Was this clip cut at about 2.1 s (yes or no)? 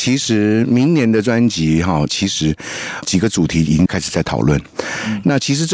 yes